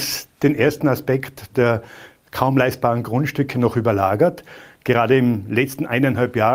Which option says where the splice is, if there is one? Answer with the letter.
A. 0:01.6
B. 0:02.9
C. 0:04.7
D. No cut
D